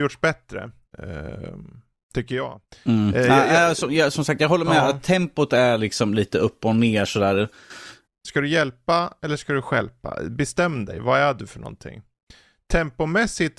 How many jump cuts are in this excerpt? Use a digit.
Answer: 1